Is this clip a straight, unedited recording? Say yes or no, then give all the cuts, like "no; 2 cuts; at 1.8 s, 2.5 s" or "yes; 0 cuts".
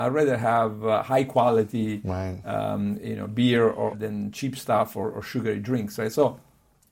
no; 1 cut; at 3.9 s